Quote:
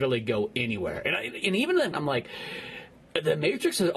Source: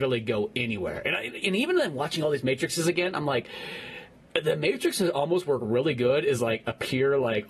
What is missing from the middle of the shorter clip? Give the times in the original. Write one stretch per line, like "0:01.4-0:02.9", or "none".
0:01.9-0:03.1